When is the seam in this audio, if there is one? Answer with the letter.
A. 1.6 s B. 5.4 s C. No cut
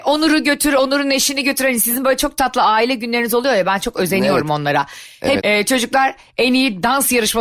B